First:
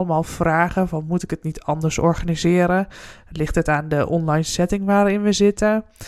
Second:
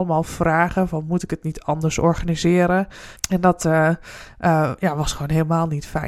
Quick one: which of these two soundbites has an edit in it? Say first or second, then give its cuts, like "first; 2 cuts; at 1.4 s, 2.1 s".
second; 1 cut; at 3.2 s